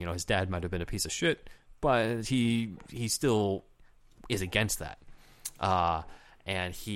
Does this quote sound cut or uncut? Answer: uncut